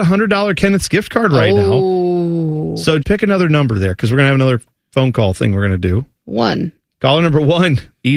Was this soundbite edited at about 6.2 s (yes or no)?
no